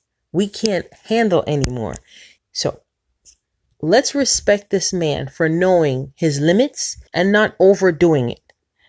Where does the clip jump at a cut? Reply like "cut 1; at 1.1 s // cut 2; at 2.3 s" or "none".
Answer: cut 1; at 2.4 s // cut 2; at 7.1 s